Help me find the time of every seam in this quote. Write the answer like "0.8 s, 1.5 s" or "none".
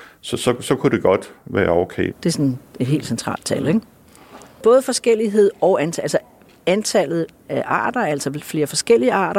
2.1 s